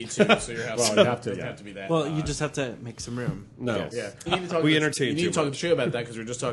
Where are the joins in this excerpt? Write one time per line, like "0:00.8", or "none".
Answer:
0:04.3